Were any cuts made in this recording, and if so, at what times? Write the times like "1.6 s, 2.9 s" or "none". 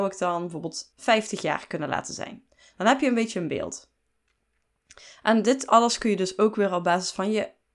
none